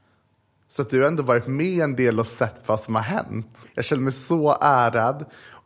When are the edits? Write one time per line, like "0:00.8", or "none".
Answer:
0:03.6